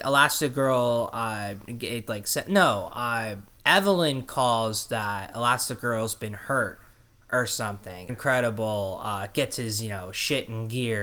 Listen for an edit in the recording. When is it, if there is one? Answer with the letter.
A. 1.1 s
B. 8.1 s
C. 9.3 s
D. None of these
B